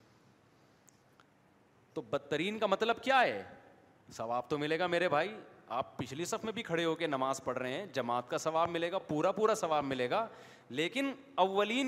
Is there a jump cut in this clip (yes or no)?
no